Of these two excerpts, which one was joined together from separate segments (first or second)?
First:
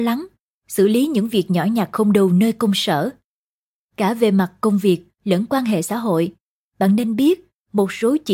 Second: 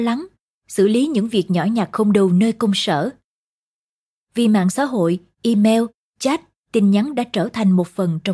first